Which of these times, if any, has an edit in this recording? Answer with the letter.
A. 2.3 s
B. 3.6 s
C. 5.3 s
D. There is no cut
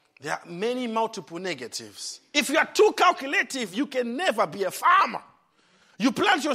A